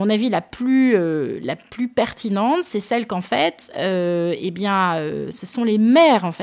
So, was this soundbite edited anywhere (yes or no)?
no